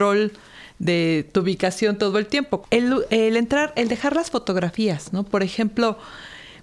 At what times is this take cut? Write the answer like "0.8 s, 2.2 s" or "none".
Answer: 2.6 s